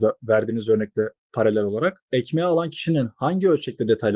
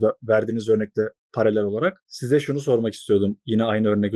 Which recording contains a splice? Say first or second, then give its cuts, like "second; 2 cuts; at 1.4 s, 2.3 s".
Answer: first; 1 cut; at 2.0 s